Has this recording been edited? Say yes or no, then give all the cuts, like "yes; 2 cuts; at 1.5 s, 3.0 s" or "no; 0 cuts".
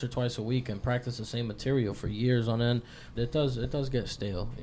yes; 1 cut; at 3.2 s